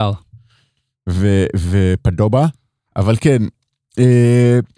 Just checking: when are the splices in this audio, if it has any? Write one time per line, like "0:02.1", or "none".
none